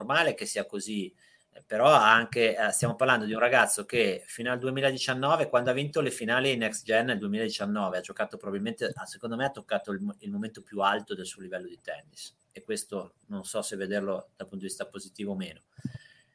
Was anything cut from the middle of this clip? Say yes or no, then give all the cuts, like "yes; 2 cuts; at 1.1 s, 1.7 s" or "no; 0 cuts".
no; 0 cuts